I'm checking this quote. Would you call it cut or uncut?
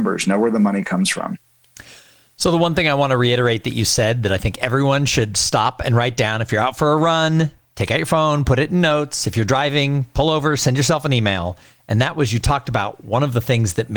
uncut